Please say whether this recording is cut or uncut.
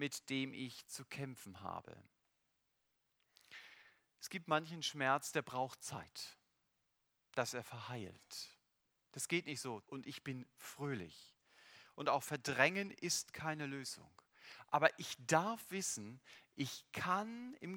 cut